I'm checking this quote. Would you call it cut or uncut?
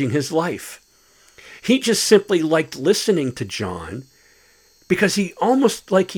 uncut